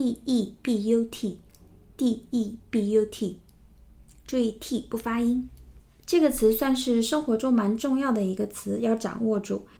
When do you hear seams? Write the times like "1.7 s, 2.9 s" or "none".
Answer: none